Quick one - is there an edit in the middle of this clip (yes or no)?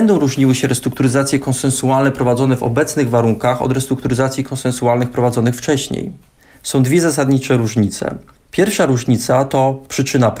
no